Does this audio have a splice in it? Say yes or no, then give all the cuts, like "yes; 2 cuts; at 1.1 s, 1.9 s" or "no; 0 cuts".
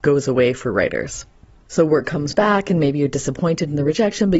yes; 1 cut; at 1.7 s